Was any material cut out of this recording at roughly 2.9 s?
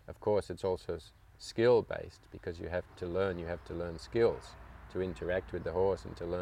yes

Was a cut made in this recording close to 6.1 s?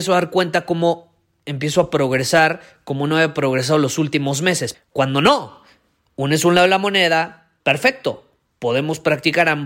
no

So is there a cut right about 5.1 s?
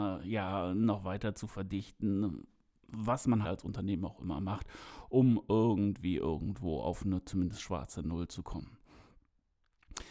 no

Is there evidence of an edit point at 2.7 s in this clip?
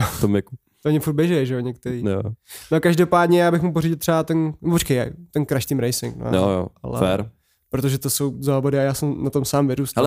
no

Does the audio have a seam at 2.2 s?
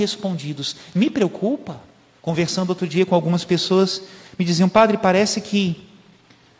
yes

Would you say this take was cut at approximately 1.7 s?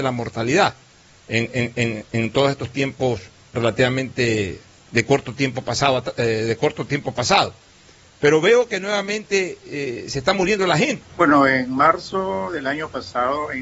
no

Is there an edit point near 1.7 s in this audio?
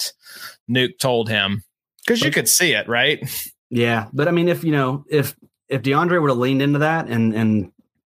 no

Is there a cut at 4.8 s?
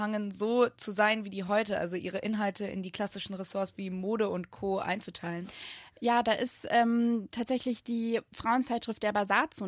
no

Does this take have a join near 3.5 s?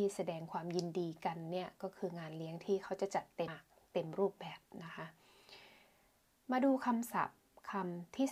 yes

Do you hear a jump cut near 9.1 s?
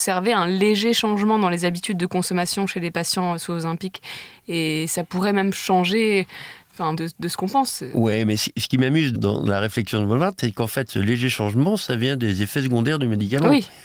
yes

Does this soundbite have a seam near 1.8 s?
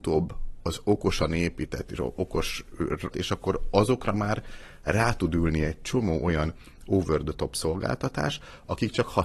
no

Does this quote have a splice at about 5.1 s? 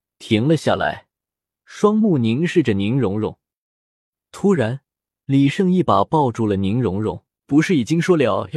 yes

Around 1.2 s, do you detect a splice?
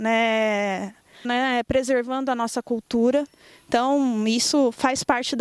yes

